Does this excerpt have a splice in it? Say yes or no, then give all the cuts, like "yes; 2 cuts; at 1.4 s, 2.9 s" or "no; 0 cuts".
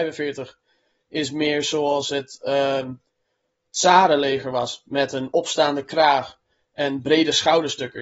no; 0 cuts